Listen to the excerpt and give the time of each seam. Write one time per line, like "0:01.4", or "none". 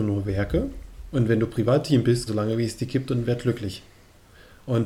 0:02.3